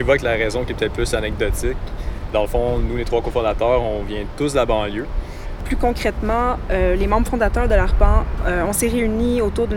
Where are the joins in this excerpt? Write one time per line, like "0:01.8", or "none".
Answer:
0:02.3
0:05.6